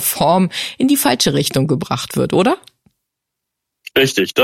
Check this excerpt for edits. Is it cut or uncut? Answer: uncut